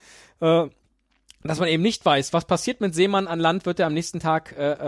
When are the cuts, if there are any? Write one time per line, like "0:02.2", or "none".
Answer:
none